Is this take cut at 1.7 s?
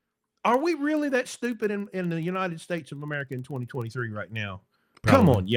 no; 0 cuts

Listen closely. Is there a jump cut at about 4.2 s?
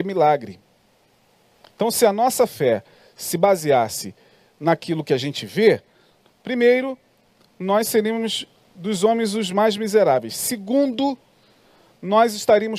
no; 0 cuts

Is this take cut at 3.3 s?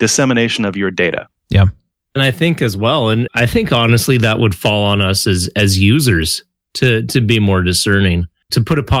yes; 1 cut; at 3.3 s

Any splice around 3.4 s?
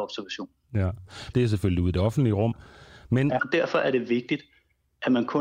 yes; 2 cuts; at 1.3 s, 3.4 s

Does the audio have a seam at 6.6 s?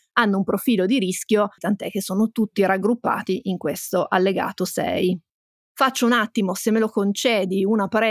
no; 1 cut; at 1.6 s

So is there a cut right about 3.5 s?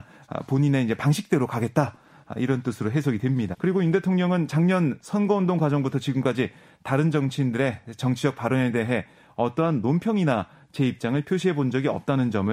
yes; 1 cut; at 3.5 s

